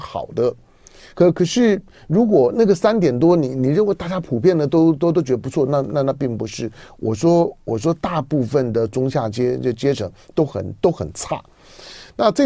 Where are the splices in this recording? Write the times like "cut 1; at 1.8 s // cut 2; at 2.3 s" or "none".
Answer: none